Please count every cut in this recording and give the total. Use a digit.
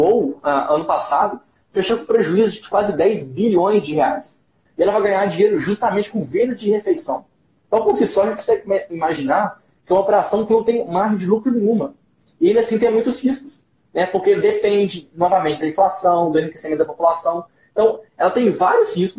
1